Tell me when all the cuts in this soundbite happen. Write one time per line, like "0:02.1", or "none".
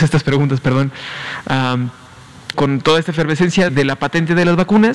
0:02.5
0:03.7